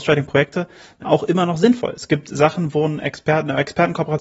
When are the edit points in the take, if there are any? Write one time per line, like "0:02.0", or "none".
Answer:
none